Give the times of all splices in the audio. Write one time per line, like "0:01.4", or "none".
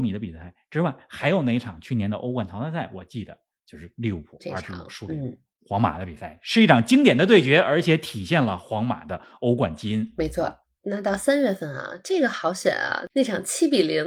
none

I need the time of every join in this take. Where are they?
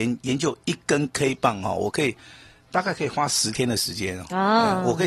none

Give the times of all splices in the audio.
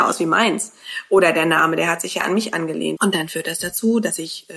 0:03.0

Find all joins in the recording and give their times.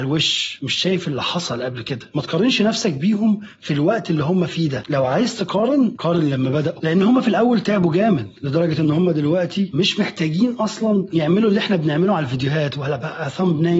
0:07.6

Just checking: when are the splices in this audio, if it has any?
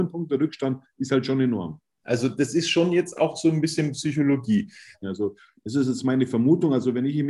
0:02.0
0:05.0

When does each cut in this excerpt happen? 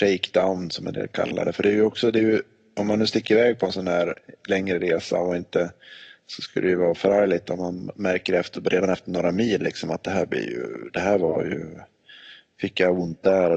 none

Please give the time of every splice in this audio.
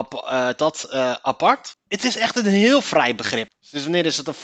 0:01.7
0:03.5

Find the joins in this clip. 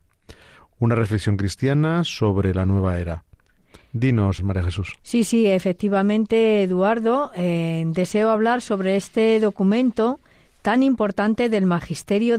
0:04.4

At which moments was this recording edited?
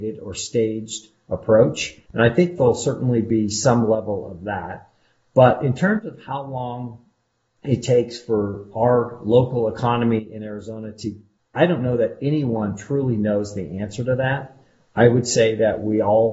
0:02.1
0:11.4

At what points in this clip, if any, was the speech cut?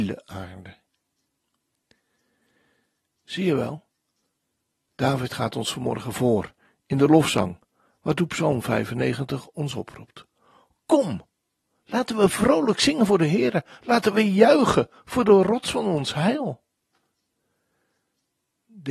none

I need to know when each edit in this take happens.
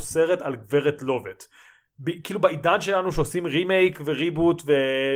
none

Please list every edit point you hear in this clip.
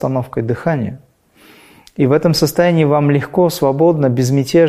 none

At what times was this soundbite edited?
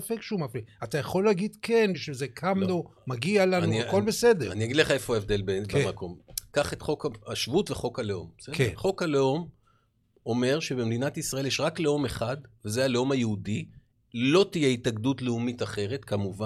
none

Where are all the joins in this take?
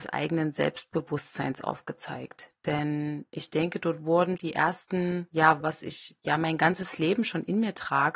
0:04.4
0:05.6

